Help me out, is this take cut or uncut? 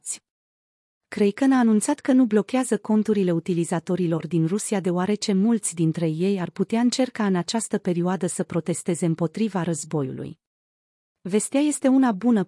cut